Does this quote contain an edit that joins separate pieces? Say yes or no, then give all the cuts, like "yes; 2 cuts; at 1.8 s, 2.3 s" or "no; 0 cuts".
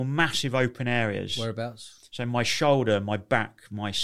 no; 0 cuts